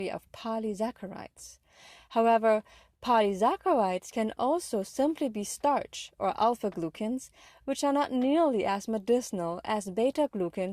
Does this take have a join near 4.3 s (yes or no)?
no